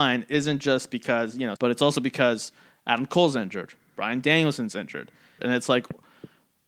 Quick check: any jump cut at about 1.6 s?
yes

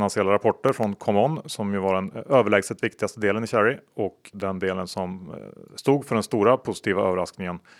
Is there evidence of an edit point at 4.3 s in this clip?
yes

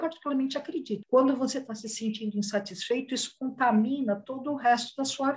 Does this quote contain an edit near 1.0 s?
yes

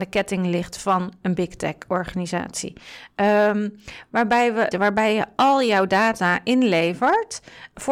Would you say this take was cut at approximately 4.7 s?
yes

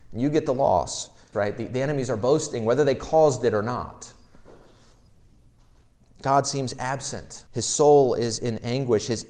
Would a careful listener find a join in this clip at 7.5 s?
yes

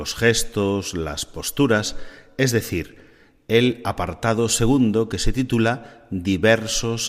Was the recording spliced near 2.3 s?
no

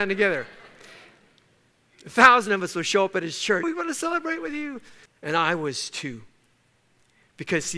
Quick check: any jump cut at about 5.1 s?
yes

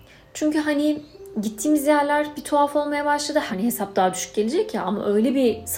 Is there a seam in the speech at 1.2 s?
no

